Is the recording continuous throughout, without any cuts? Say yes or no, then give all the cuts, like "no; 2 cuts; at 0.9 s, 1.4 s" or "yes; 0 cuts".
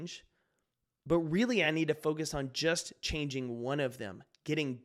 yes; 0 cuts